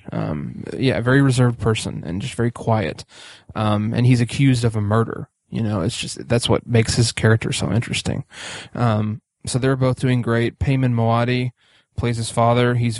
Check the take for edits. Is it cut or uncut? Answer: uncut